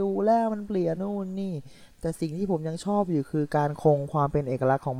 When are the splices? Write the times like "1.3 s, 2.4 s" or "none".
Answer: 0.9 s